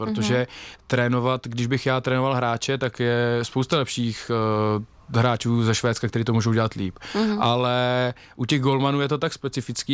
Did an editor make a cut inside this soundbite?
no; 0 cuts

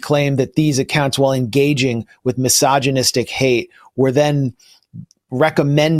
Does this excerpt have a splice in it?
no; 0 cuts

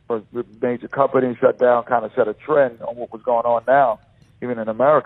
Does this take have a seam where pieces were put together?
no; 0 cuts

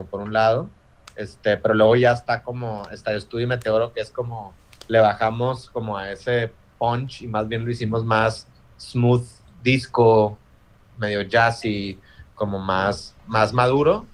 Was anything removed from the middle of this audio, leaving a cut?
no; 0 cuts

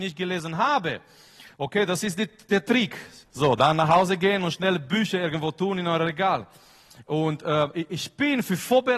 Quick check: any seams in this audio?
yes; 1 cut; at 3.2 s

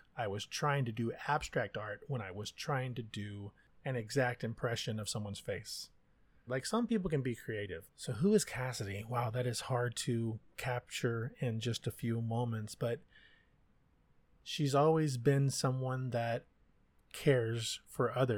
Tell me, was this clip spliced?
yes; 2 cuts; at 6.5 s, 7.9 s

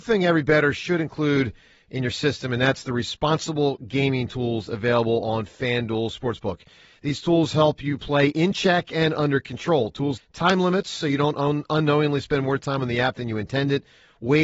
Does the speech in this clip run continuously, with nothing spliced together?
no; 1 cut; at 10.2 s

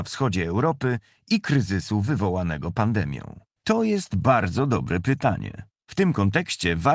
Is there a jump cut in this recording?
yes; 2 cuts; at 3.6 s, 5.8 s

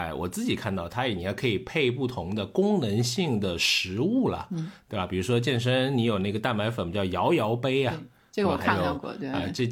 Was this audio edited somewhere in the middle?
no; 0 cuts

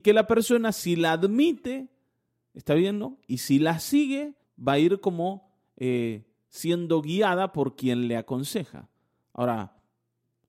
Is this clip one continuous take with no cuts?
no; 1 cut; at 4.4 s

